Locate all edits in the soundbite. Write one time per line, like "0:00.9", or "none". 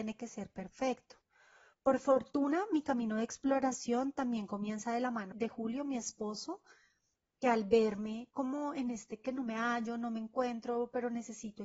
0:05.3